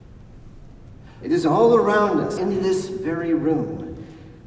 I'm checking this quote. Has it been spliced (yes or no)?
yes